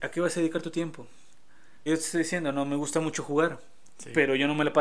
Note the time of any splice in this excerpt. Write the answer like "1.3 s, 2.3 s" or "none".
1.9 s